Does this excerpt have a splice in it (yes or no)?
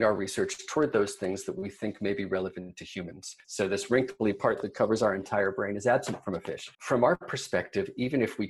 yes